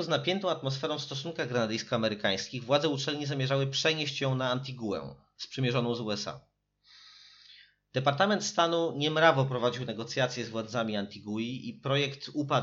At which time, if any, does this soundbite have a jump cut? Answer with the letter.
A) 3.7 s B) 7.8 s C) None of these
C